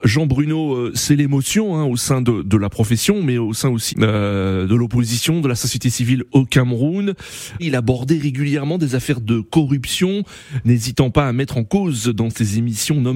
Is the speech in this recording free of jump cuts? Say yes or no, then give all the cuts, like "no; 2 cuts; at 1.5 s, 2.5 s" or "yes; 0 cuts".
no; 2 cuts; at 3.9 s, 7.6 s